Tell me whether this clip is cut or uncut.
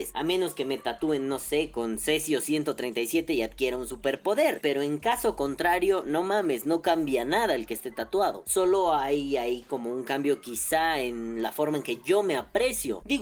uncut